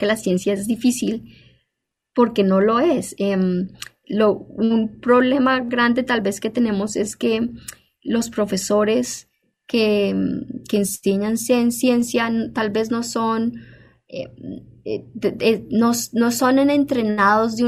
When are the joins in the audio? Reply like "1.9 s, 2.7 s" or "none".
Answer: none